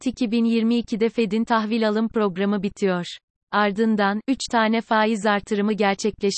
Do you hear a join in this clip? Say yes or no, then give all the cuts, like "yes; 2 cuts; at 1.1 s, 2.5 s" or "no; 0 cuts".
no; 0 cuts